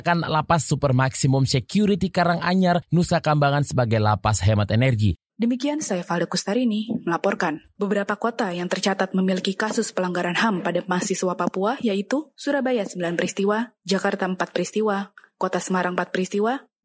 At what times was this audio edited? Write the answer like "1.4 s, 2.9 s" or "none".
5.3 s, 7.8 s